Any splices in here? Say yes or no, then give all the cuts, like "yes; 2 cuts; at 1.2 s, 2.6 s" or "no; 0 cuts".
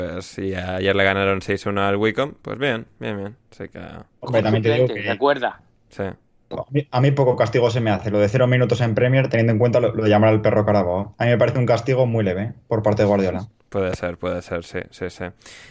no; 0 cuts